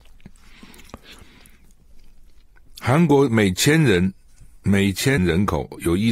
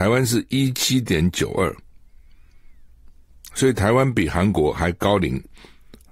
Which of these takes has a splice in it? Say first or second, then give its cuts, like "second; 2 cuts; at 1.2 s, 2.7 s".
first; 1 cut; at 5.2 s